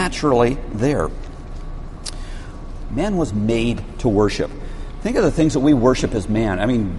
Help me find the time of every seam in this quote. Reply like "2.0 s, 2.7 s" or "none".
2.9 s